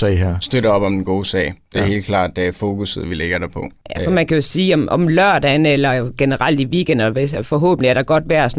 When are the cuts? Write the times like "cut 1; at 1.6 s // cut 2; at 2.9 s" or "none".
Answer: none